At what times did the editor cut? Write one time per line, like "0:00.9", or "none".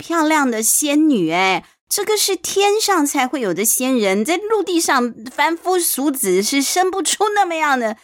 none